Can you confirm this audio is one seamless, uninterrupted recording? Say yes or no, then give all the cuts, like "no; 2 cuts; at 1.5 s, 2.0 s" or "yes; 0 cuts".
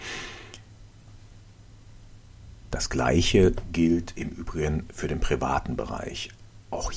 no; 1 cut; at 2.7 s